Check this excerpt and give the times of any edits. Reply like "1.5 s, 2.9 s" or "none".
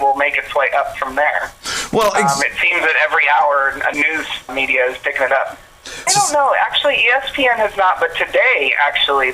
6.1 s